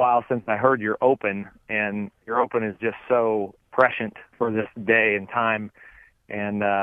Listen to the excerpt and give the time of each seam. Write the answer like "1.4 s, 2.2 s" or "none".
3.6 s